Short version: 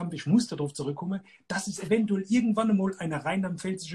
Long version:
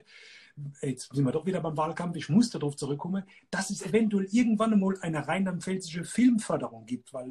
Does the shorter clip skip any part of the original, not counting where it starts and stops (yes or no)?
no